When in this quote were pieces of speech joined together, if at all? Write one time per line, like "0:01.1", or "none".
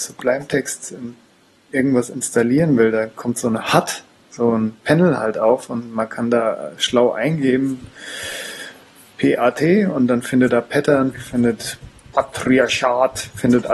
0:11.1